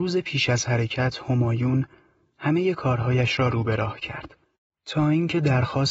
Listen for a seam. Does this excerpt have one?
yes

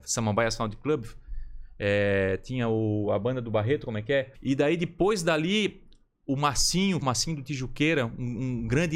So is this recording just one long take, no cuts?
no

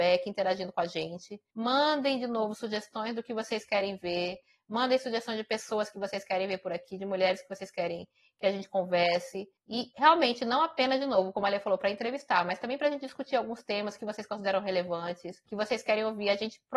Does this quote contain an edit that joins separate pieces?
no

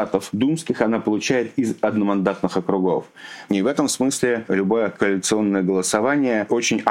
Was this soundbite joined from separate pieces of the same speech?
no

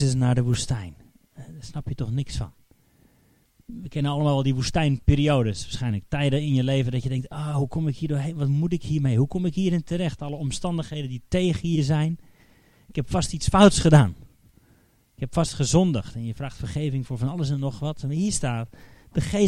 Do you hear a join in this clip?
no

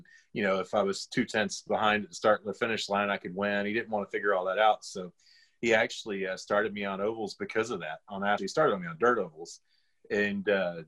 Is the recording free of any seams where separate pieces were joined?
no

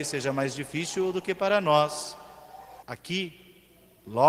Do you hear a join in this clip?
yes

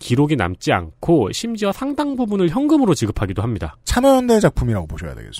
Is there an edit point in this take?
yes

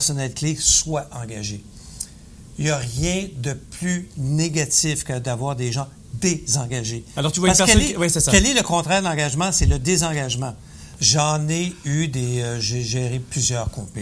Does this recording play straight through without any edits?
no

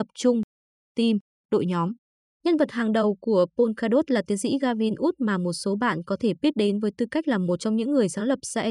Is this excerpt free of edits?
no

